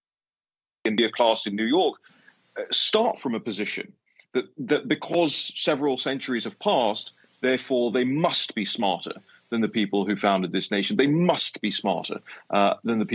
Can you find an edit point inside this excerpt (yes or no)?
no